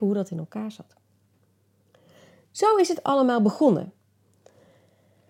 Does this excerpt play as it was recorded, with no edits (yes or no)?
yes